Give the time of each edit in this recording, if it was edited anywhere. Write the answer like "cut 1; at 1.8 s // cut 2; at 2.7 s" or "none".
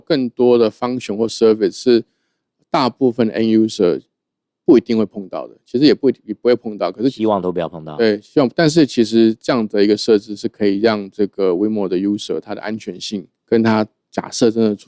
cut 1; at 13.4 s

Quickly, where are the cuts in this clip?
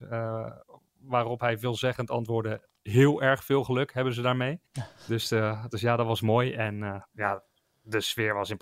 cut 1; at 4.7 s

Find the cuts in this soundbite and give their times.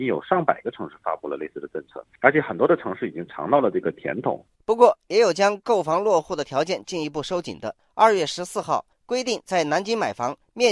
cut 1; at 4.5 s // cut 2; at 8.9 s

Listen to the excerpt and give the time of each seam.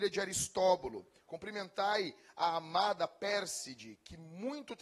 cut 1; at 1.3 s

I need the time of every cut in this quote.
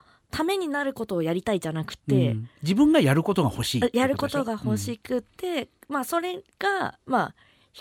none

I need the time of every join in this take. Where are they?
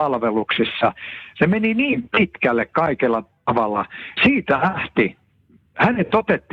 cut 1; at 4.2 s

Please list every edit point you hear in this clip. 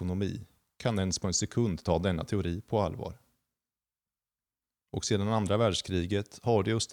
cut 1; at 4.8 s

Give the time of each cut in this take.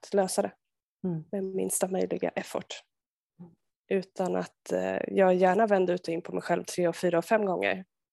cut 1; at 3.7 s

